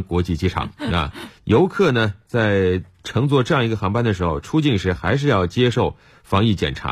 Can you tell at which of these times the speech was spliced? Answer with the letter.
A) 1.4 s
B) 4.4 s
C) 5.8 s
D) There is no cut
A